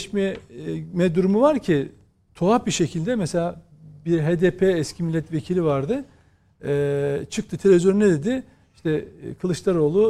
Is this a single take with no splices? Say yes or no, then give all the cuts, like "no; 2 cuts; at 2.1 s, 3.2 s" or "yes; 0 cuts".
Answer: yes; 0 cuts